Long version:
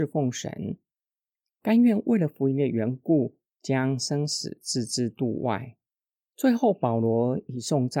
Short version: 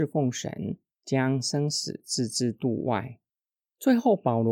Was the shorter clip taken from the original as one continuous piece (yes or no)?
no